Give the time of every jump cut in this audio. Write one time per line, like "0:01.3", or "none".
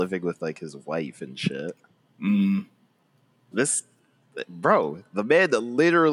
0:03.5